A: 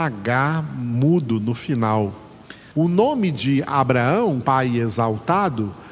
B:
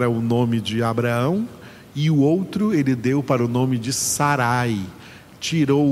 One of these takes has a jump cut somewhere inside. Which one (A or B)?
A